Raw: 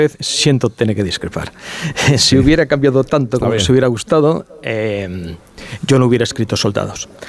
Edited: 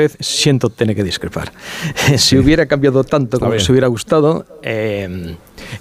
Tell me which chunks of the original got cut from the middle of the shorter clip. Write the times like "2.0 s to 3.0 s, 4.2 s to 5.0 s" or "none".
none